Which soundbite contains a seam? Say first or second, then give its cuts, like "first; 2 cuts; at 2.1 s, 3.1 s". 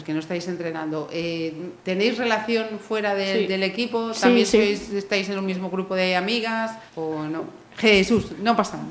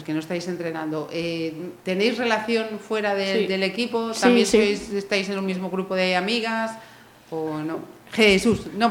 first; 1 cut; at 6.9 s